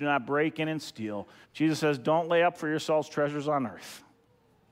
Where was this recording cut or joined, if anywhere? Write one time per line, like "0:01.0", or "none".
0:01.4